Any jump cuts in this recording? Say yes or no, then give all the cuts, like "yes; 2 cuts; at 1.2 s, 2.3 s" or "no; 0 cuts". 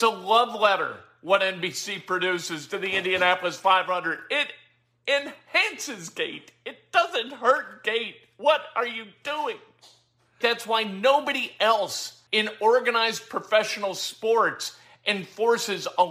yes; 2 cuts; at 10.4 s, 12.3 s